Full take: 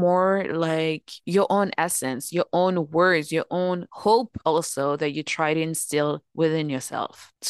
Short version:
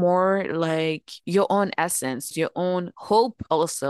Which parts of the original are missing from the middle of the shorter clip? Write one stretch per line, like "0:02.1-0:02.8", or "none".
0:02.3-0:03.3